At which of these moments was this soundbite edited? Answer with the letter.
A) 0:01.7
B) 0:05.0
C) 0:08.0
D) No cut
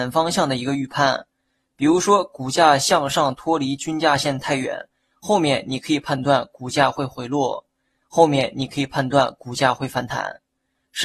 C